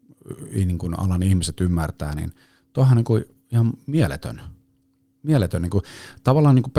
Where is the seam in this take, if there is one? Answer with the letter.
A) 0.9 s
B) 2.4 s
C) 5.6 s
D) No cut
D